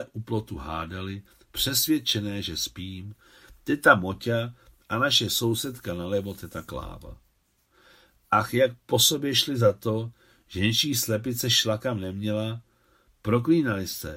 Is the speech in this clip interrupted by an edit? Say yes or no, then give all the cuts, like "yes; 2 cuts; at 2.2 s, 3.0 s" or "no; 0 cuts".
no; 0 cuts